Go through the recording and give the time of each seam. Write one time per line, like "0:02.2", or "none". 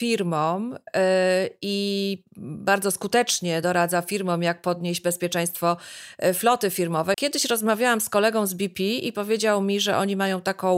0:07.1